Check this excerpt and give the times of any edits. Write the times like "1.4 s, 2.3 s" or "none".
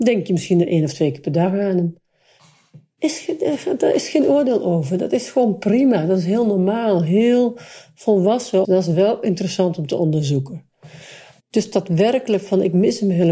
8.6 s, 11.4 s